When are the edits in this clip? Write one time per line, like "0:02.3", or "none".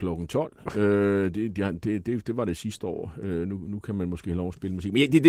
none

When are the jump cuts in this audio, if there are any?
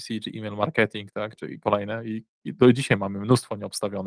0:01.4

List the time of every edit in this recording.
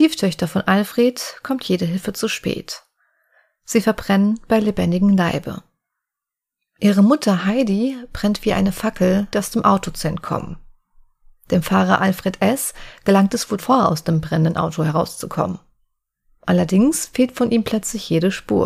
0:09.3
0:13.6

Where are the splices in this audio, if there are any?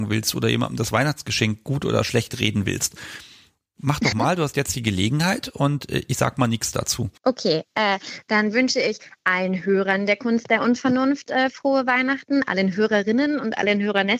0:04.1
0:07.2

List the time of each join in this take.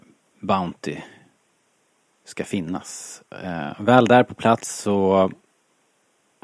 none

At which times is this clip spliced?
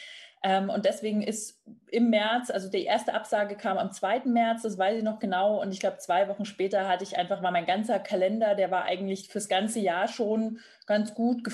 none

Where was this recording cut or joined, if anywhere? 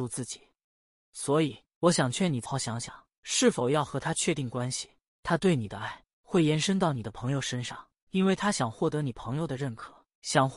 0:02.4
0:05.2

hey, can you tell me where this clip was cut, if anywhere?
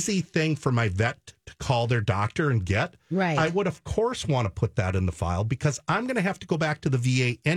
none

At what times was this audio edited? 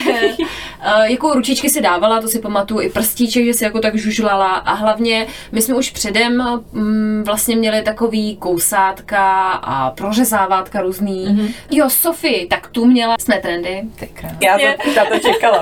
0:11.7
0:13.2
0:14.4

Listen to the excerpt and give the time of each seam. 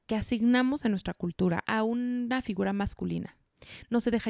0:01.6

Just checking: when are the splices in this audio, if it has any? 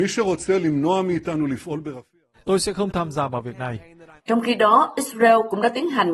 0:02.3
0:04.2

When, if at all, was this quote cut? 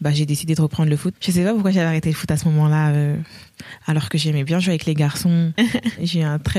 0:01.1
0:05.6

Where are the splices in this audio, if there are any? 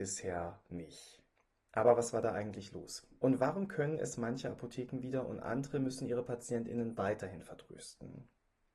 none

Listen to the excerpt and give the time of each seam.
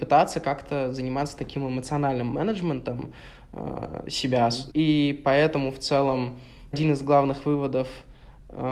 0:04.7
0:06.7

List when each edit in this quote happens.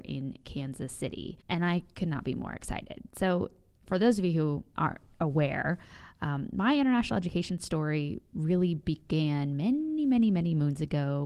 none

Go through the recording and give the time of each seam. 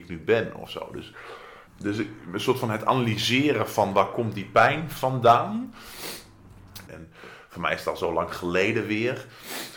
0:01.7
0:06.9

